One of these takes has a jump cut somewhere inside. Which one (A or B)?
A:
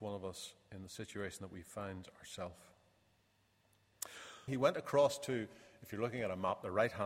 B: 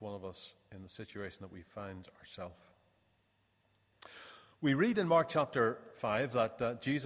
A